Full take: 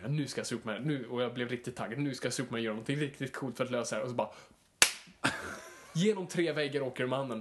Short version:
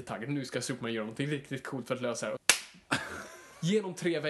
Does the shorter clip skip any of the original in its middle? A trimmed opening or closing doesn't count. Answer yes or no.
yes